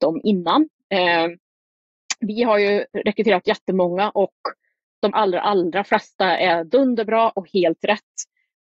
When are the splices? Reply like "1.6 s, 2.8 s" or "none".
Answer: 5.1 s